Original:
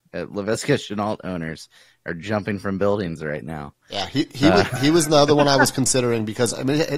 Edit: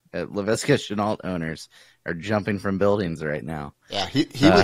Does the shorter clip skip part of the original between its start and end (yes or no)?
no